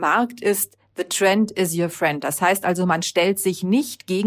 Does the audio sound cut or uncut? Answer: uncut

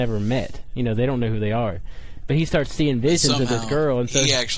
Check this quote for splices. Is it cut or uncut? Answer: uncut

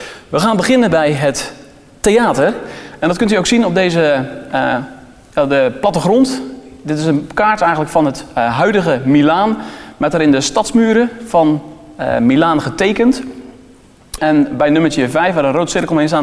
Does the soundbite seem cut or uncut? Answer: cut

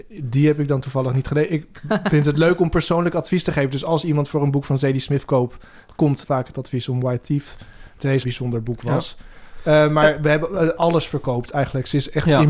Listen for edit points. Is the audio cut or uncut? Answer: cut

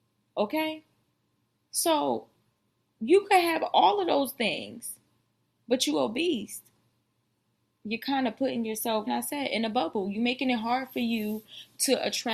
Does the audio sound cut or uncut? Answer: cut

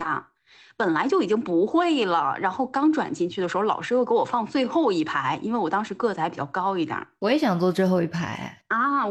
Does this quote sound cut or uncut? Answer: uncut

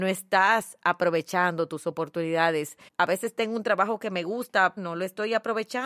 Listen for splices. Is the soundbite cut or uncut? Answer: cut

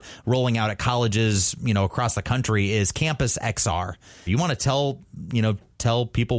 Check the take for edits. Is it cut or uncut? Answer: cut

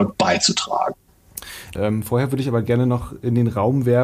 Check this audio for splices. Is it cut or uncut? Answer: cut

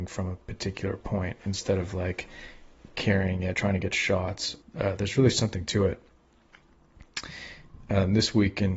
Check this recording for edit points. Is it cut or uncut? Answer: cut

